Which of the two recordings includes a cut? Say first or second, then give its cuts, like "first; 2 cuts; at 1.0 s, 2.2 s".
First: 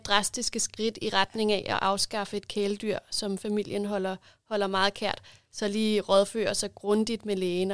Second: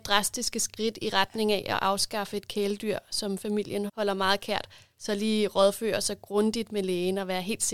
second; 1 cut; at 3.9 s